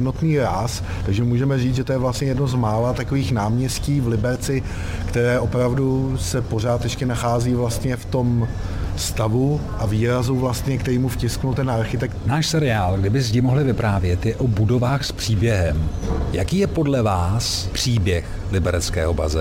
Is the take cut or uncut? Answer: uncut